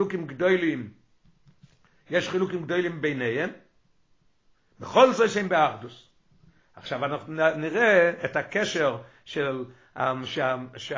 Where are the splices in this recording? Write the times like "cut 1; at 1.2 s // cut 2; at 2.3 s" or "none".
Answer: none